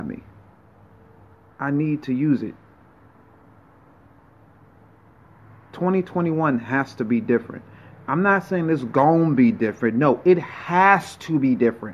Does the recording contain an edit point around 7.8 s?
no; 1 cut; at 1.5 s

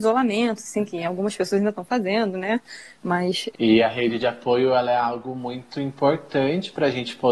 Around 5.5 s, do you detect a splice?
no; 1 cut; at 3.5 s

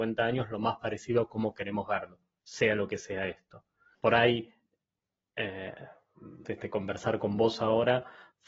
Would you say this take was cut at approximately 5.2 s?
no; 2 cuts; at 3.9 s, 6.4 s

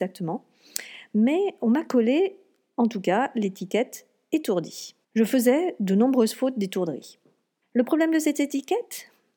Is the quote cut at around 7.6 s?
yes; 2 cuts; at 5.0 s, 7.6 s

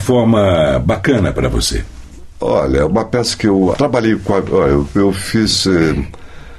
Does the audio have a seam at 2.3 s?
no; 1 cut; at 3.7 s

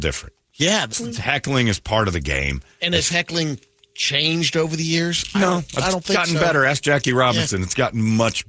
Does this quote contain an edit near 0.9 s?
yes; 1 cut; at 0.9 s

